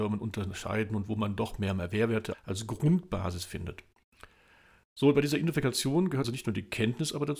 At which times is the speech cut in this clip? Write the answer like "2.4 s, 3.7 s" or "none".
2.3 s, 6.2 s